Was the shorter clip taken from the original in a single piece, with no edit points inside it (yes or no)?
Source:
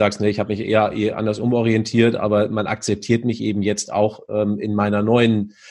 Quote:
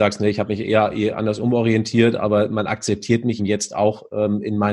no